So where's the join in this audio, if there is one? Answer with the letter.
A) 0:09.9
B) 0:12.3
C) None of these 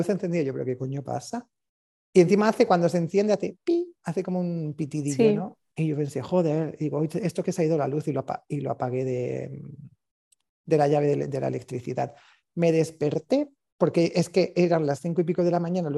C